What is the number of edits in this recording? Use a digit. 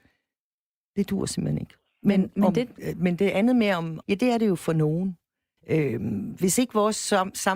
2